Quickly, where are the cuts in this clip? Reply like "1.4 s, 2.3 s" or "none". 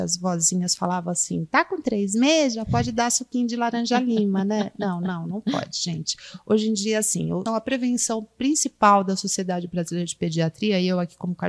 7.5 s